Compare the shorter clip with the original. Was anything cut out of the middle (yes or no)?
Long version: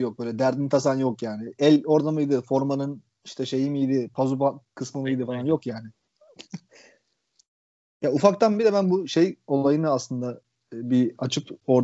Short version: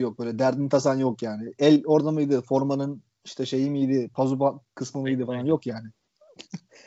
no